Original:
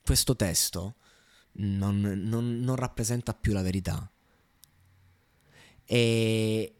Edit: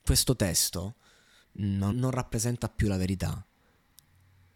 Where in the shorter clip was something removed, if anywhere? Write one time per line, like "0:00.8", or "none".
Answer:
0:01.9